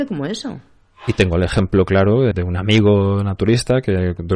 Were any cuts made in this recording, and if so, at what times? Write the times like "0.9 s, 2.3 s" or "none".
2.3 s